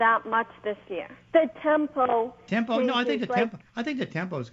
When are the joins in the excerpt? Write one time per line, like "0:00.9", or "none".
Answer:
0:01.3

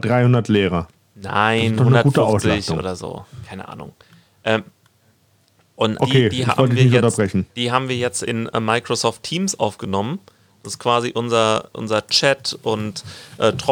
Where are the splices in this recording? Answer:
0:06.0

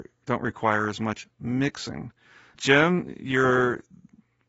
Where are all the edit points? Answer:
0:02.5

